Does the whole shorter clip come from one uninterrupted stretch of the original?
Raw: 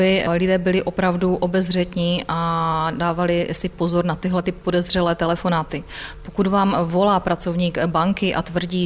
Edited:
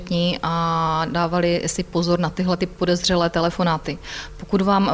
yes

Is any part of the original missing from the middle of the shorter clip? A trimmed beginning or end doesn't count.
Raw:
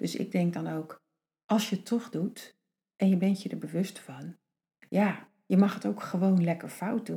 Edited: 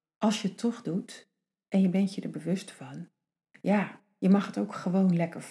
no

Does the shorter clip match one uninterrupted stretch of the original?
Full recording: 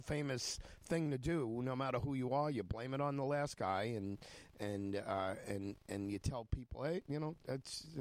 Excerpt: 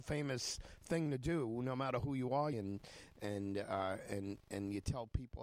no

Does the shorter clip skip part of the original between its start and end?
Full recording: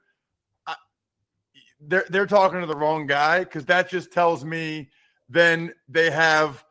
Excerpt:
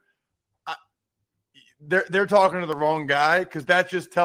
no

